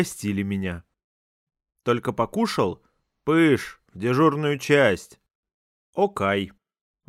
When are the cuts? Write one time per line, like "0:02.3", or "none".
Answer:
0:05.7